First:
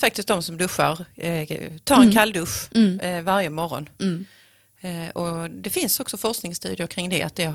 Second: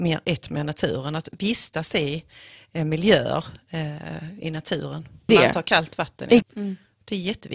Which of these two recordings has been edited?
second; 2 cuts; at 5.3 s, 6.4 s

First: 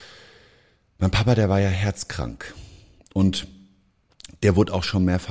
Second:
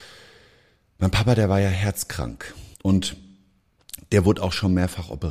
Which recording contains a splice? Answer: second; 1 cut; at 2.7 s

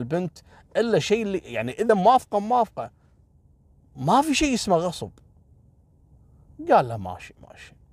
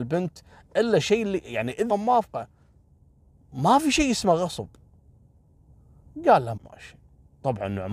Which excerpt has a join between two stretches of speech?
second; 2 cuts; at 1.9 s, 6.6 s

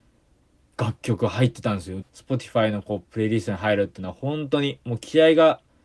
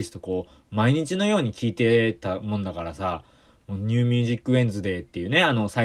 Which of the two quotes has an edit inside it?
first; 1 cut; at 2.0 s

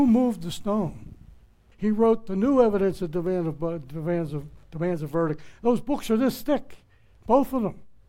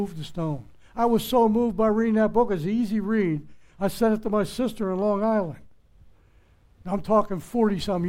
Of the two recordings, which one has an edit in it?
first; 1 cut; at 1.7 s

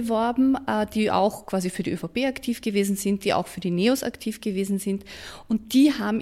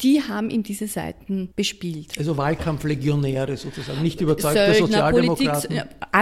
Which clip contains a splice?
second; 1 cut; at 1.5 s

